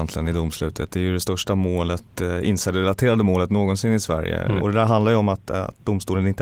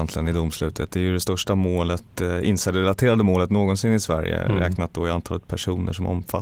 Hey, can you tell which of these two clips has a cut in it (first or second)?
first